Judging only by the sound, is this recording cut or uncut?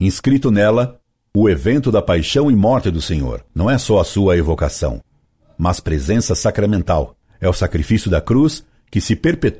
uncut